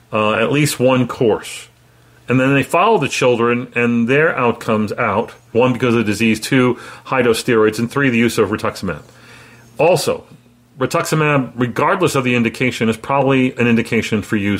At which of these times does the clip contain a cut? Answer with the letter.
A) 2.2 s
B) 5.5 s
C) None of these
B